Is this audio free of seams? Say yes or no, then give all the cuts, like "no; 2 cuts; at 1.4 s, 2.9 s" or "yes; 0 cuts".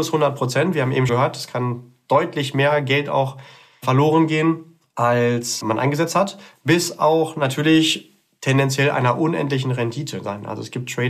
no; 1 cut; at 1.1 s